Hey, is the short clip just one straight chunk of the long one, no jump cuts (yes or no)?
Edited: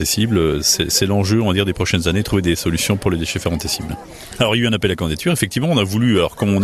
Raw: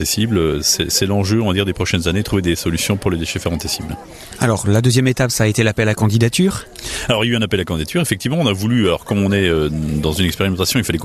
no